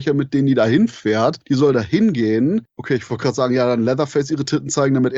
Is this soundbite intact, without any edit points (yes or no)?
yes